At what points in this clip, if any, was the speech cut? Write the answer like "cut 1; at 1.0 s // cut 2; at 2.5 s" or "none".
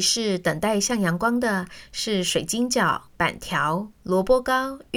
none